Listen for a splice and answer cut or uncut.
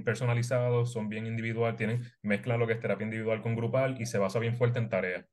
uncut